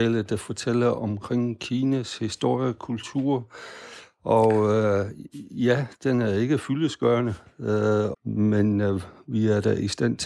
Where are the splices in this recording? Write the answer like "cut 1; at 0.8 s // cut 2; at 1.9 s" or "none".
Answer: cut 1; at 8.1 s